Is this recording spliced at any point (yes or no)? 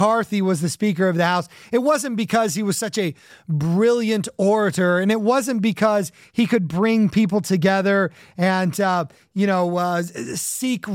no